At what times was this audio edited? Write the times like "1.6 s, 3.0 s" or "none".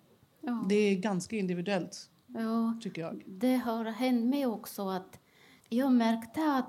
5.6 s